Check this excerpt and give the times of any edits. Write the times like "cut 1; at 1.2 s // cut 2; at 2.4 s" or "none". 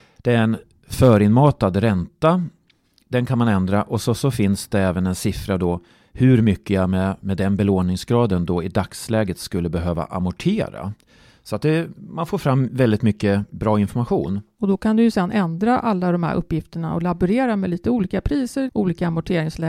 cut 1; at 14.6 s // cut 2; at 18.7 s

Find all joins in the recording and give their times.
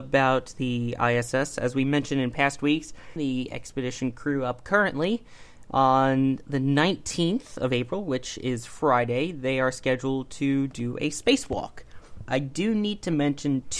cut 1; at 3.2 s // cut 2; at 12.3 s

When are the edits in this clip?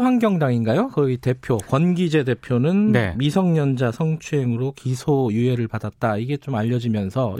none

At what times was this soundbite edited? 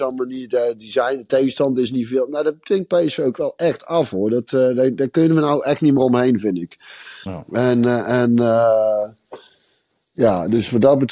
none

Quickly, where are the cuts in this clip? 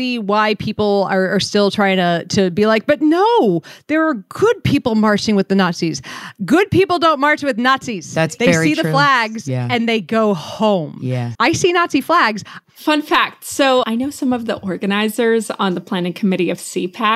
cut 1; at 11.3 s // cut 2; at 12.6 s // cut 3; at 13.8 s

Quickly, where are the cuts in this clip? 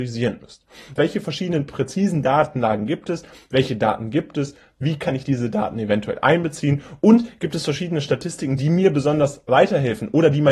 cut 1; at 1.0 s

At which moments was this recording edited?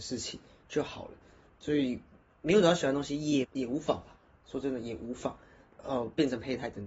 cut 1; at 3.4 s // cut 2; at 5.7 s

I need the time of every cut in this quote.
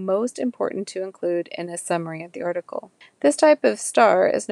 cut 1; at 3.0 s

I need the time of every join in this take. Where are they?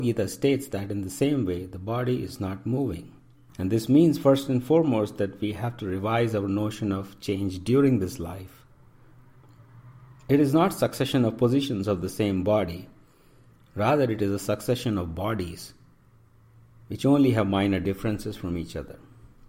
cut 1; at 3.5 s

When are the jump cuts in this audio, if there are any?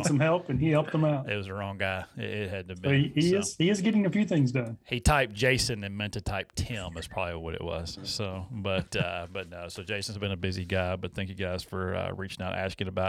none

